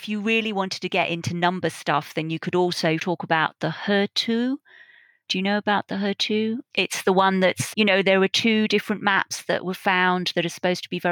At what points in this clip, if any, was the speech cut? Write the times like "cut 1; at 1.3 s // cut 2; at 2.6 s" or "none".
cut 1; at 3.0 s // cut 2; at 7.7 s